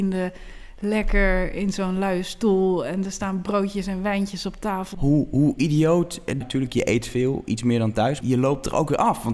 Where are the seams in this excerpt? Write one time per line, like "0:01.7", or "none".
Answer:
0:04.9
0:06.4
0:08.2